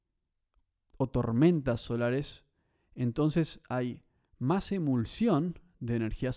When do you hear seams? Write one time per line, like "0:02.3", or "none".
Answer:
none